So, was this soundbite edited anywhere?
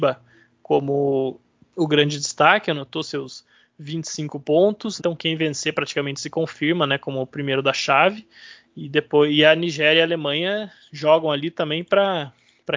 yes; 1 cut; at 5.0 s

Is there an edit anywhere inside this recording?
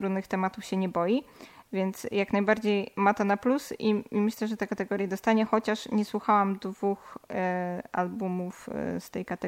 no; 0 cuts

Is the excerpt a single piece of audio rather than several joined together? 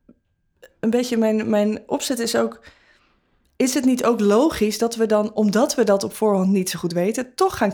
yes; 0 cuts

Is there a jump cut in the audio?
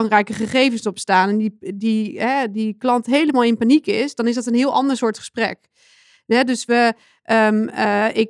no; 0 cuts

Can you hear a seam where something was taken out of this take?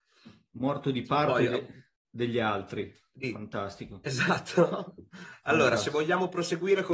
yes; 1 cut; at 2.0 s

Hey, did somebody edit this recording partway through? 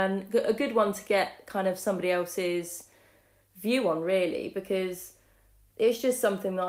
no; 0 cuts

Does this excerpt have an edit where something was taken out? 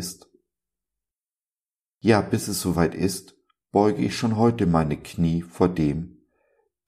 no; 0 cuts

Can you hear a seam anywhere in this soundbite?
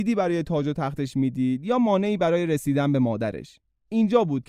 no; 0 cuts

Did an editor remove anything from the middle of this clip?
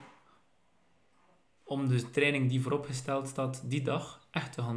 no; 0 cuts

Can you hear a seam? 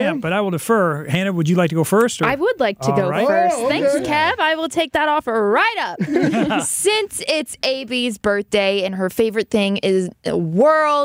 no; 0 cuts

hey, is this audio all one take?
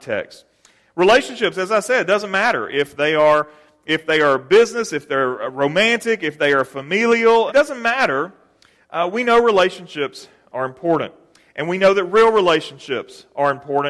no; 1 cut; at 7.5 s

